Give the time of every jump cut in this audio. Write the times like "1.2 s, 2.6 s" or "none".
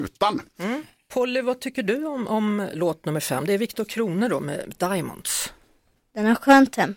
none